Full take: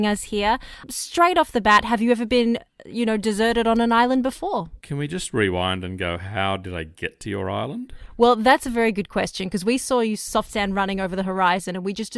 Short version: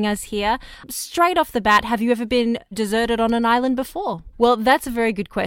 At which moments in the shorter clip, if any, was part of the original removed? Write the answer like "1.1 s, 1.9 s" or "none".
2.7 s, 4.3 s